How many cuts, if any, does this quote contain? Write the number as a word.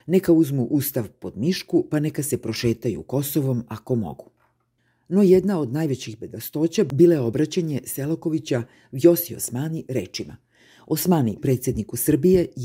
one